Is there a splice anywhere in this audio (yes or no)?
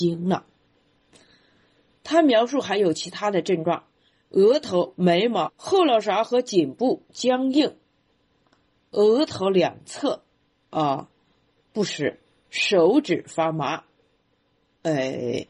yes